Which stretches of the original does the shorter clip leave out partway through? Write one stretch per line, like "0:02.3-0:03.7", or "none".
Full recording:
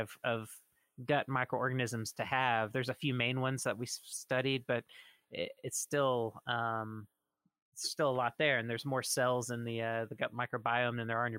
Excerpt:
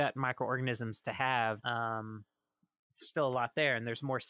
0:02.7-0:06.4